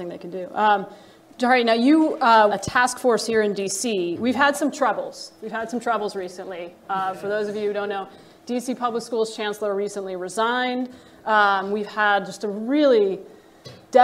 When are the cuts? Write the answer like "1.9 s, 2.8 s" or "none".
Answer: 2.5 s

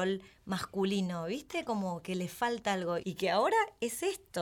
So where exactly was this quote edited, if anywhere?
3.0 s

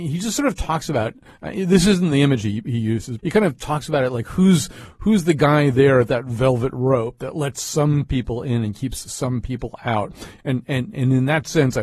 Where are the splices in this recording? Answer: 3.2 s, 10.4 s

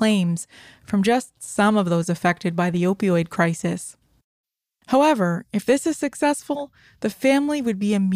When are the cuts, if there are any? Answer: none

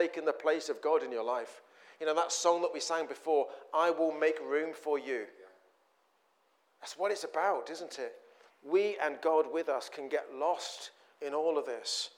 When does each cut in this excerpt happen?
8.5 s

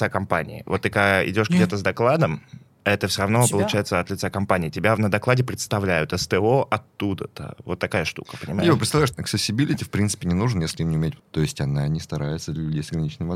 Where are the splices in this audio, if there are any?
9.1 s, 11.2 s

